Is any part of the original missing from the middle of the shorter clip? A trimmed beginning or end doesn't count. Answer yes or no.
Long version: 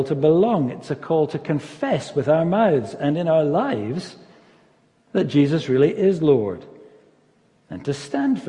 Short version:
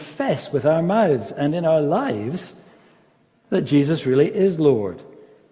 no